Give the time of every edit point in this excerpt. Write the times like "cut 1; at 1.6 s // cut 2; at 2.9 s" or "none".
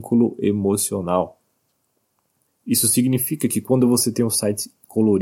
cut 1; at 2.5 s